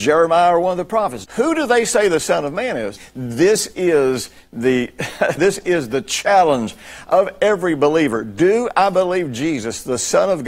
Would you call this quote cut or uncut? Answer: cut